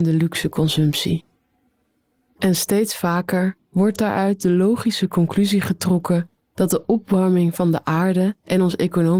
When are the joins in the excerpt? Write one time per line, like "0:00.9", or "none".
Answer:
0:02.3